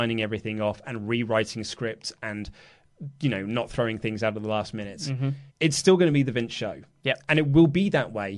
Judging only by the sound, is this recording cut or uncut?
cut